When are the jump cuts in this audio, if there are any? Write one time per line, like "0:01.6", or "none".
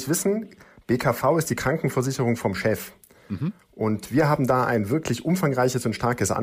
none